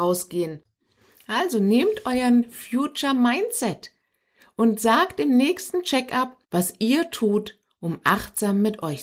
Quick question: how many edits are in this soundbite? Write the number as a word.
one